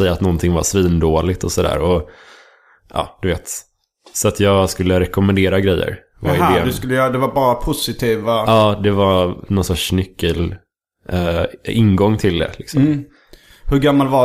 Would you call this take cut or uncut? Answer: uncut